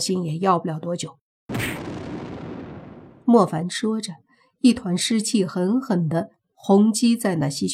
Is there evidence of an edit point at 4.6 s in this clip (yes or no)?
no